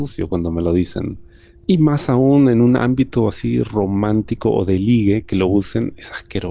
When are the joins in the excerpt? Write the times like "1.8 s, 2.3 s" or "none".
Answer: 1.6 s